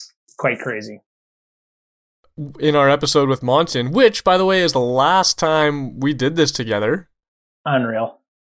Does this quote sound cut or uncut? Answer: cut